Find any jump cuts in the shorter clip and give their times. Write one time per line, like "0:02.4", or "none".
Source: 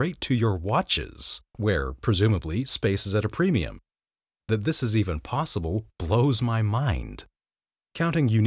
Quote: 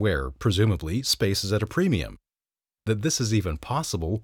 none